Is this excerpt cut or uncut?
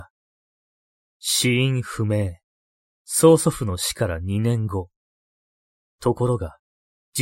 cut